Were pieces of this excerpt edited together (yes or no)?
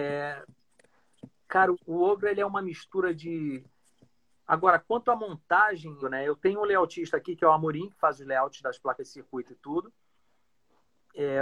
yes